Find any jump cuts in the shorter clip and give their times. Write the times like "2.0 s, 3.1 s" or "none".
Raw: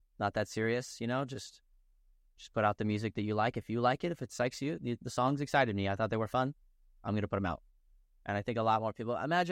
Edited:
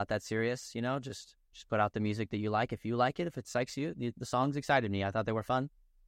1.4 s